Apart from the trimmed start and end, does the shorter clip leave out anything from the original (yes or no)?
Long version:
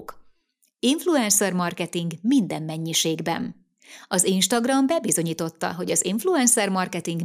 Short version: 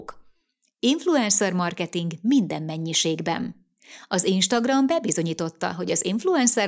no